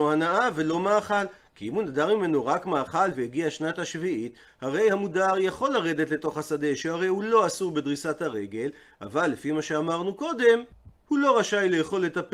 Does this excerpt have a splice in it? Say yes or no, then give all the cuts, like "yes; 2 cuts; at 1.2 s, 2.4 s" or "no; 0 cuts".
no; 0 cuts